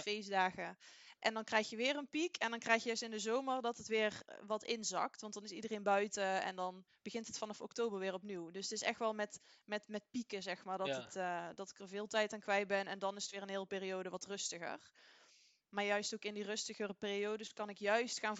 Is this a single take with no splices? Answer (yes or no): yes